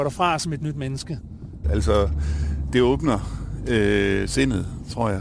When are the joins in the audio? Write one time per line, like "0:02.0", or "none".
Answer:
0:01.6